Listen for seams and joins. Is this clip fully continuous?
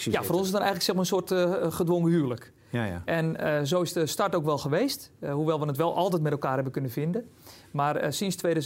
yes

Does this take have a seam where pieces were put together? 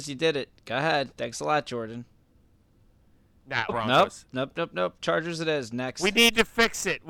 yes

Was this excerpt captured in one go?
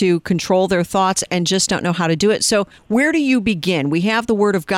yes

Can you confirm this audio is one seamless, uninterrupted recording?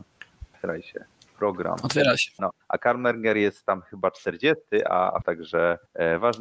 no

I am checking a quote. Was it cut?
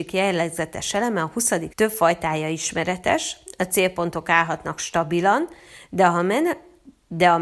yes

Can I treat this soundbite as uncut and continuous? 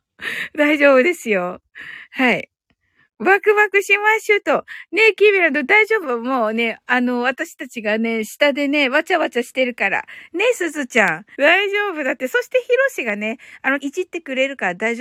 no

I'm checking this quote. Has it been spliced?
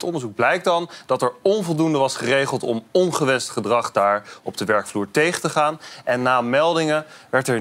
no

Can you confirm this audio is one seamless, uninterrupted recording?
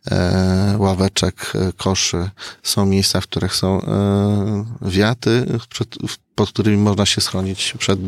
yes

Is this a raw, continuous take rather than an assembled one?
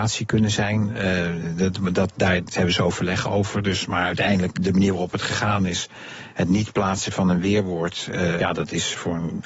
no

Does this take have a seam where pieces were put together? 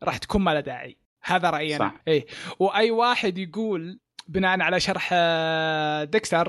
yes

